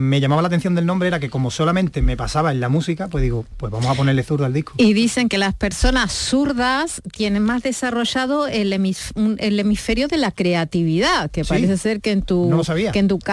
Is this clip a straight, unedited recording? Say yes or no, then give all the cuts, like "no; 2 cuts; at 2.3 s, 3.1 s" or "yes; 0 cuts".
yes; 0 cuts